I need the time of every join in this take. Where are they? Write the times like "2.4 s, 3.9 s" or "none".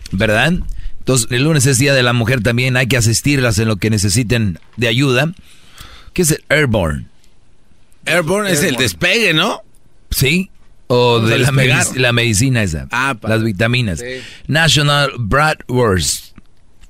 1.3 s, 6.1 s